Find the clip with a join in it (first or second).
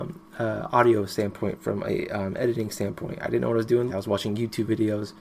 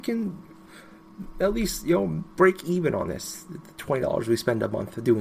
first